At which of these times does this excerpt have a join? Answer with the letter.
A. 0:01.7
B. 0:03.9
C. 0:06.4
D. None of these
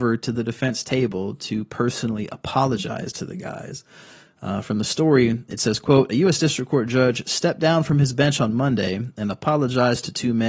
D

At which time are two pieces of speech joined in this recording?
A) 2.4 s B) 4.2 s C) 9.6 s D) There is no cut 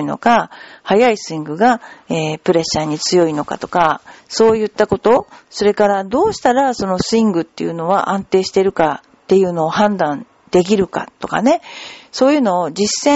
D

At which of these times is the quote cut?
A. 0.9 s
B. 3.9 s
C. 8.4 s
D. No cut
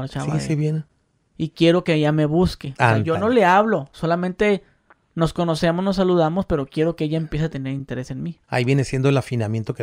C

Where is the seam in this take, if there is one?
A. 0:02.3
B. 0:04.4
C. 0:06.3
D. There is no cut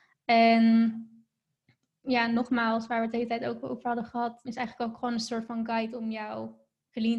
B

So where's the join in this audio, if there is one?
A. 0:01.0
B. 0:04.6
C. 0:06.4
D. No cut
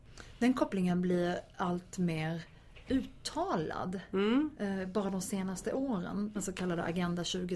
C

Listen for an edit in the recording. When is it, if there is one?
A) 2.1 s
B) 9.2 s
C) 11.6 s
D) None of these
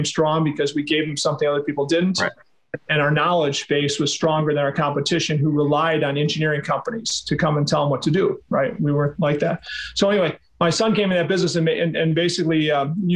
D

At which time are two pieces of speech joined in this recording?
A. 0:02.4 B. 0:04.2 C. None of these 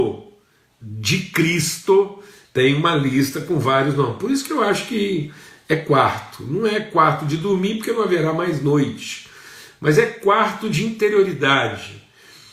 A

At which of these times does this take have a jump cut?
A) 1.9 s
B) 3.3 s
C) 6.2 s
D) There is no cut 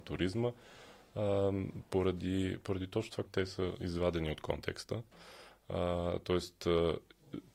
B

